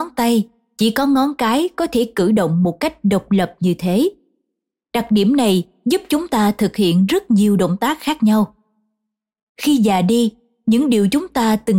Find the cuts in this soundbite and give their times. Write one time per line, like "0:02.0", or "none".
none